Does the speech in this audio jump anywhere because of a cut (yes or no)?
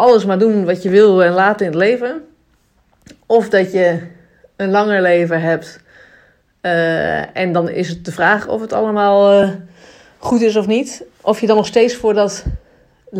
no